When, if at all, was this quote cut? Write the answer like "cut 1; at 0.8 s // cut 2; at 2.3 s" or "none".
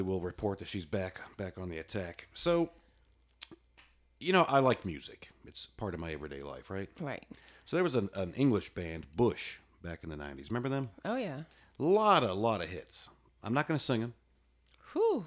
none